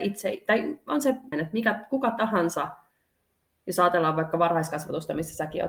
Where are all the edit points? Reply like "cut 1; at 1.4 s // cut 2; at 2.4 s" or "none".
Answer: cut 1; at 1.3 s